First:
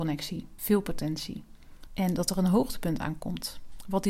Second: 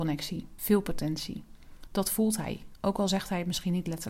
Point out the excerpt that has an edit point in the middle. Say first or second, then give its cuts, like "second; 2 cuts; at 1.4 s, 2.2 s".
first; 1 cut; at 1.9 s